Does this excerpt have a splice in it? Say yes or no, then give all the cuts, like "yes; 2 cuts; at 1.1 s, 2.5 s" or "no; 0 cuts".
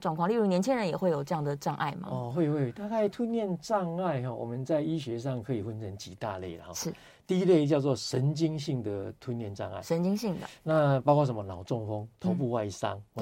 no; 0 cuts